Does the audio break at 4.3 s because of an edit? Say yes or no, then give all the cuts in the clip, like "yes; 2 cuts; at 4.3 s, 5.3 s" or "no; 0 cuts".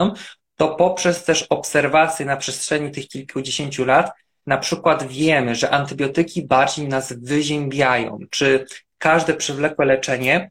no; 0 cuts